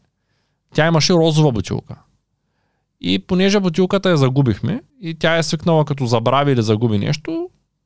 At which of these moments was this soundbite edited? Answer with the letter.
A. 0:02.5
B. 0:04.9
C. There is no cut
B